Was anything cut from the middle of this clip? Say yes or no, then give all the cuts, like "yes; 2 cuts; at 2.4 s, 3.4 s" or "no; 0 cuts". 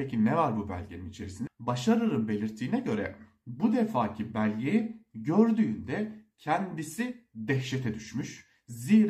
yes; 1 cut; at 1.5 s